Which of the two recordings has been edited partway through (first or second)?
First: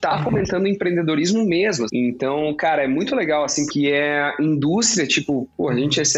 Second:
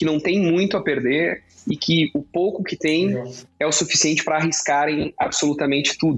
first